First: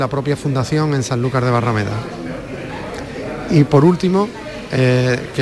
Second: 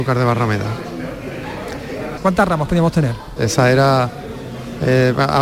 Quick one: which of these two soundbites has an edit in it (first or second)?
second